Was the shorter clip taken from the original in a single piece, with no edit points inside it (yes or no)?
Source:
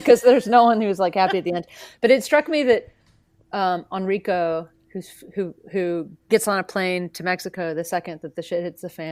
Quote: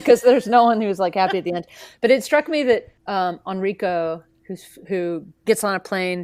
no